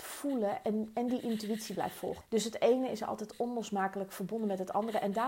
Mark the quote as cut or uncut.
cut